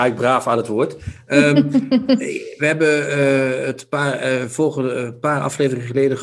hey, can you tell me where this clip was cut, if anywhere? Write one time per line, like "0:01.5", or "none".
none